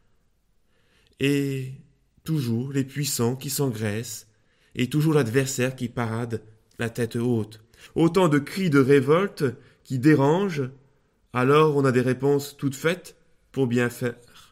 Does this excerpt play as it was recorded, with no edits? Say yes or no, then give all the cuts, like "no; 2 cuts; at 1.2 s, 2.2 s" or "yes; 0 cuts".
no; 1 cut; at 7.9 s